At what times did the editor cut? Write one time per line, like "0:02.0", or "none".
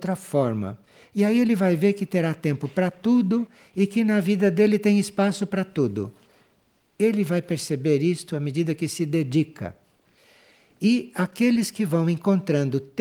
none